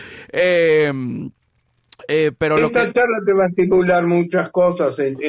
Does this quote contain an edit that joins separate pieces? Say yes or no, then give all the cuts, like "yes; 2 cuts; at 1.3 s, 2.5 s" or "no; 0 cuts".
no; 0 cuts